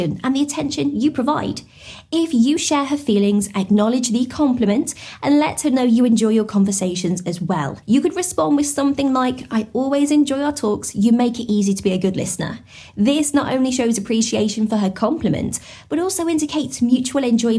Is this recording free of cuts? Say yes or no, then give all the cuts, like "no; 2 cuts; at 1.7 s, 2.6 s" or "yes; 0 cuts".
yes; 0 cuts